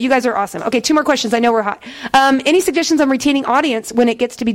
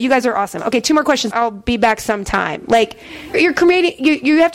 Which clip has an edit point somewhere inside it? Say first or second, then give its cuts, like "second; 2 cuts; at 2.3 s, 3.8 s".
second; 2 cuts; at 1.3 s, 3.3 s